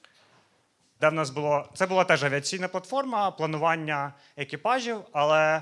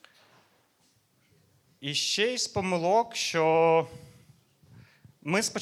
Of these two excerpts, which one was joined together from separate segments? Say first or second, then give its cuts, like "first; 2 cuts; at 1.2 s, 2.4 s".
first; 1 cut; at 1.0 s